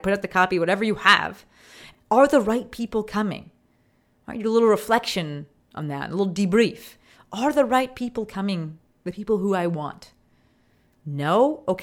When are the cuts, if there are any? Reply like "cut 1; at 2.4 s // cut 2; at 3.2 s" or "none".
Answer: cut 1; at 1.9 s

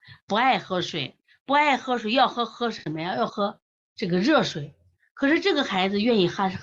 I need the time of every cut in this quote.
cut 1; at 3.3 s

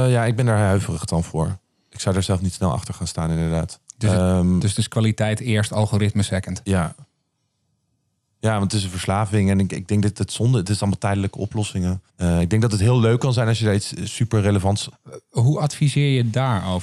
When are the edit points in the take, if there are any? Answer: cut 1; at 12.1 s // cut 2; at 14.9 s

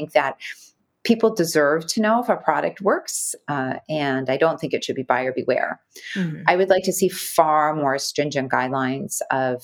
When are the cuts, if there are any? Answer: none

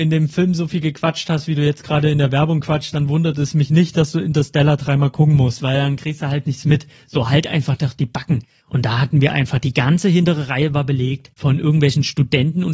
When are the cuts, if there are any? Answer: cut 1; at 8.6 s

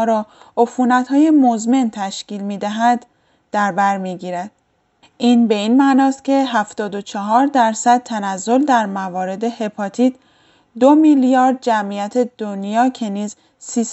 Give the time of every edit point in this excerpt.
cut 1; at 5.0 s

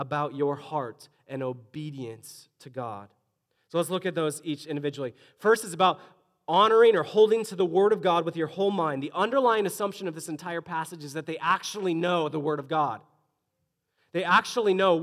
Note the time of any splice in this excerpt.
none

